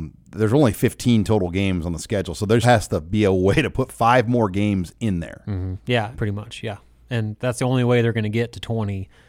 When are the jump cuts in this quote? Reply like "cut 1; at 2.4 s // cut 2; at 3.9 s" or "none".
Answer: cut 1; at 2.6 s // cut 2; at 6.1 s